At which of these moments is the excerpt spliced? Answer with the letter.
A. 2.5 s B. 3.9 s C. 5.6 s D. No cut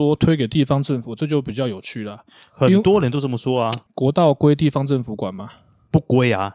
B